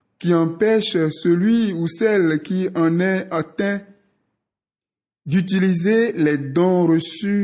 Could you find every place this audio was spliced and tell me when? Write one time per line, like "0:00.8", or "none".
none

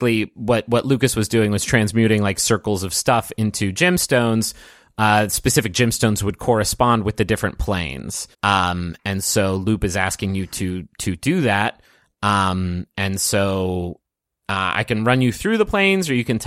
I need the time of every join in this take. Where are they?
0:08.3

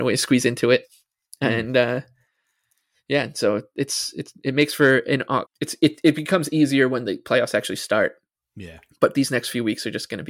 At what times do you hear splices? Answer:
0:05.4

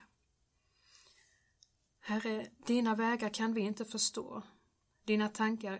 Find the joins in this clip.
none

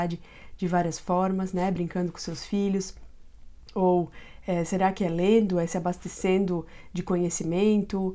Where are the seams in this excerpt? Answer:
none

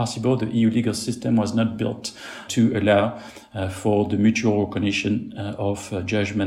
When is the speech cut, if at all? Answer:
0:02.5

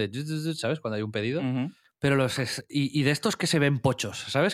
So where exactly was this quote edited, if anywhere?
0:01.9

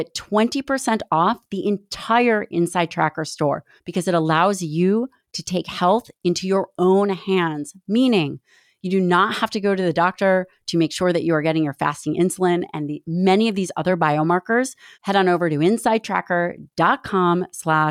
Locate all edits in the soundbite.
0:03.8
0:14.9

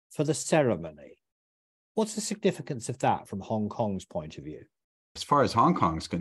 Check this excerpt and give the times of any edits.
none

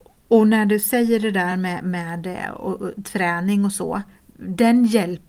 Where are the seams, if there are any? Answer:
none

